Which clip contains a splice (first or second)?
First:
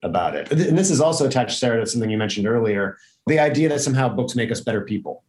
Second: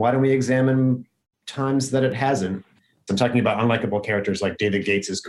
second